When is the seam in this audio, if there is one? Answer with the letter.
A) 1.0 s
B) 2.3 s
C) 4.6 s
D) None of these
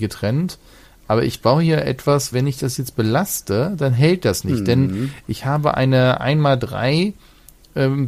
B